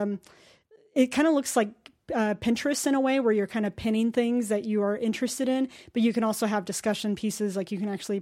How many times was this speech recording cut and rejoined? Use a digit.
0